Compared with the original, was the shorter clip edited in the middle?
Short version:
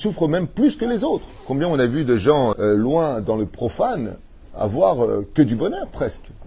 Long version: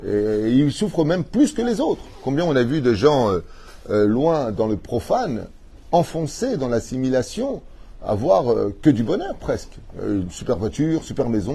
yes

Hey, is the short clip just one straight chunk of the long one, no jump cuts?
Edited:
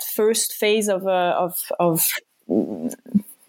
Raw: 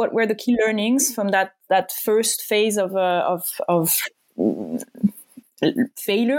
yes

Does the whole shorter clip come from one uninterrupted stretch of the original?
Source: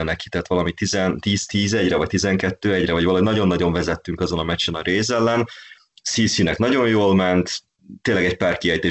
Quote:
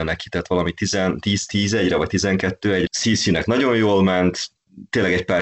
no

